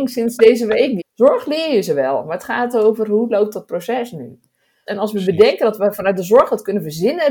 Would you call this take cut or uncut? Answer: cut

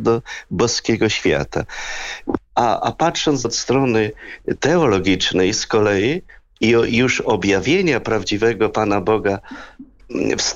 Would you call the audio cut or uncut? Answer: cut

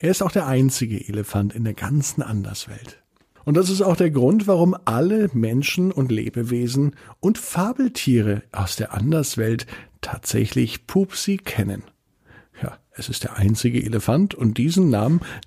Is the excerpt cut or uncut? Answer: uncut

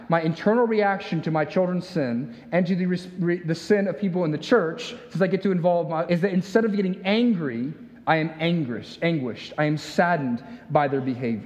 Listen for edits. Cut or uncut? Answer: cut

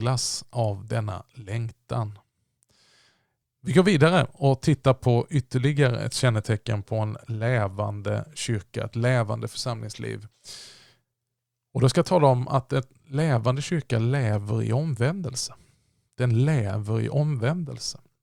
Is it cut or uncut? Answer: uncut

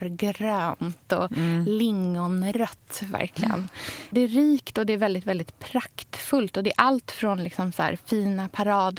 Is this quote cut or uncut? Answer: uncut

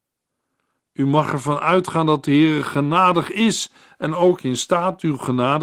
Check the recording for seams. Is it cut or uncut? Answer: uncut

